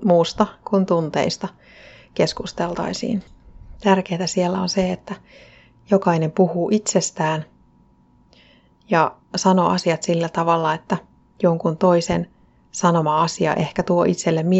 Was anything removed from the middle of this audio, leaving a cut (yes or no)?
yes